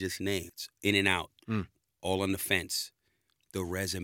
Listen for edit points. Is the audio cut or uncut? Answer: uncut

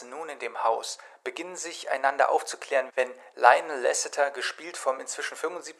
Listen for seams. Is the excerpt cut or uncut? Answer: cut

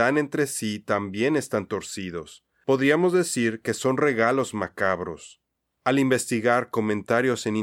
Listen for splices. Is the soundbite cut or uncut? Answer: uncut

